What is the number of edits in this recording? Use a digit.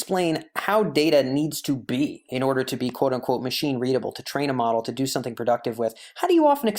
0